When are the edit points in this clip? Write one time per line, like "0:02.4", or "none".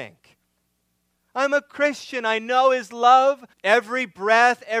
0:03.5